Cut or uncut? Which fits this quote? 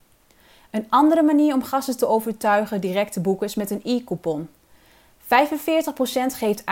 uncut